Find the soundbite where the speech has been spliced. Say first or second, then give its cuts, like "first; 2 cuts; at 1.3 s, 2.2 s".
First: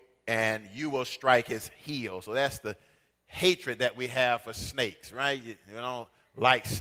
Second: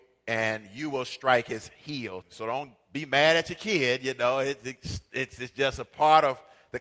second; 1 cut; at 2.2 s